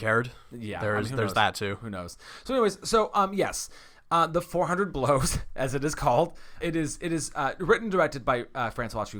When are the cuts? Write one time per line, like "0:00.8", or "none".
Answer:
0:06.6